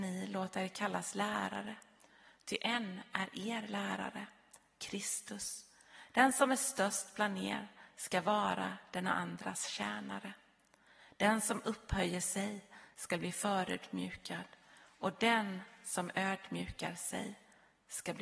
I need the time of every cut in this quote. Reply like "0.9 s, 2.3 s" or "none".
none